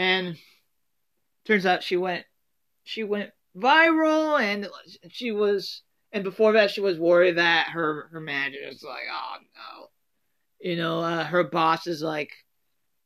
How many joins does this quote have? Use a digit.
0